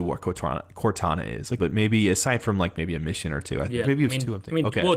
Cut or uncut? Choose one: cut